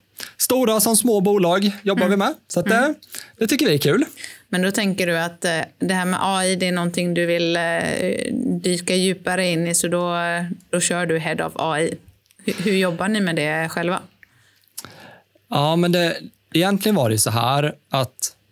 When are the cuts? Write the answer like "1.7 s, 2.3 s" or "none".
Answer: none

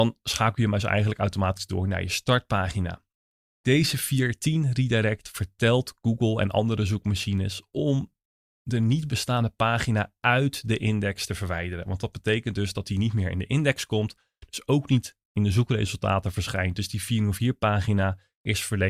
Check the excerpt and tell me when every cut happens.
none

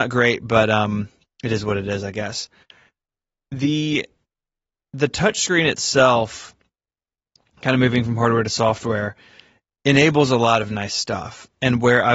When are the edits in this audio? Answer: none

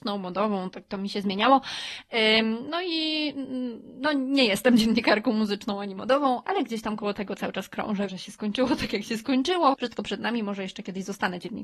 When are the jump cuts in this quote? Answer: 6.4 s, 8.1 s, 9.7 s

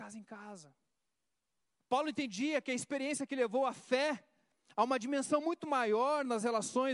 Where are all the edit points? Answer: 1.8 s

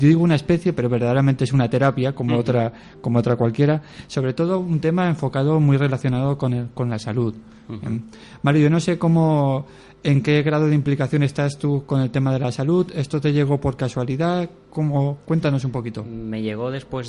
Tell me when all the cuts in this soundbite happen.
none

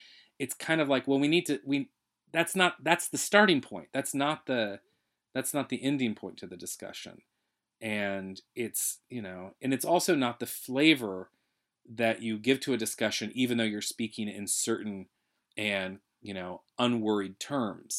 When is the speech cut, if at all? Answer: none

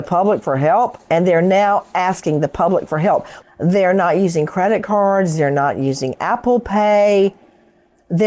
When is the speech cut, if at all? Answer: 1.1 s, 3.4 s

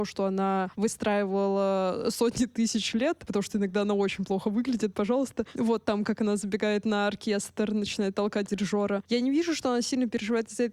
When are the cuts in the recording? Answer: 4.9 s, 9.1 s

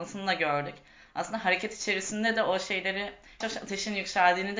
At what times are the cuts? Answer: 3.4 s

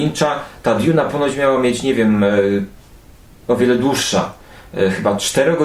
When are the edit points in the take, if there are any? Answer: none

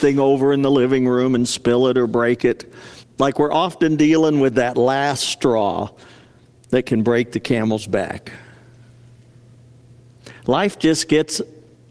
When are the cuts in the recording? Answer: 3.0 s

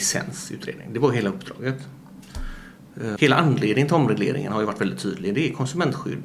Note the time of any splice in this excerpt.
3.2 s

